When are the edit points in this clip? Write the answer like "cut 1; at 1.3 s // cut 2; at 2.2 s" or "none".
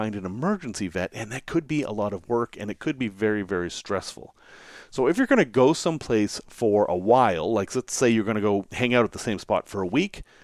none